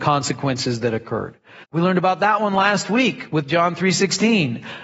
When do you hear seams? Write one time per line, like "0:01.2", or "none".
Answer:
0:01.6

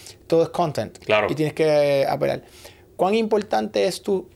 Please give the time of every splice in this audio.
none

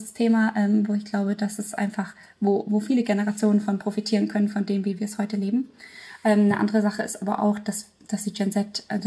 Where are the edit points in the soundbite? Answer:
none

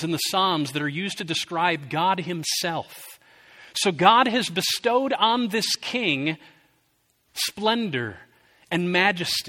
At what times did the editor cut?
none

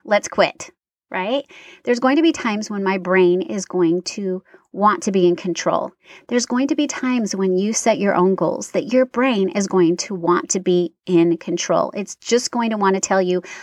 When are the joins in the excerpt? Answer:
none

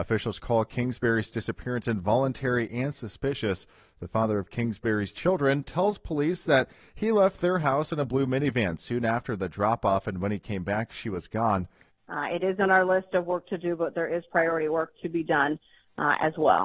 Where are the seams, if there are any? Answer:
0:11.9

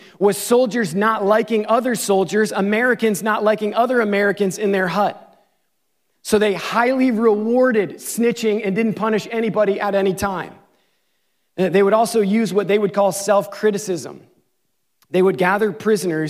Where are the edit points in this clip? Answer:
none

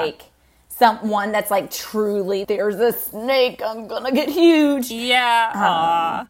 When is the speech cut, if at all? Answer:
0:02.4

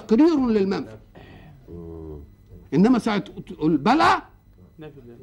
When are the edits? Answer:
0:02.6

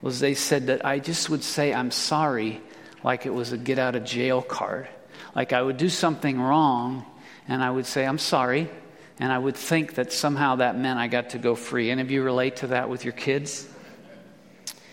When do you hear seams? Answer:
none

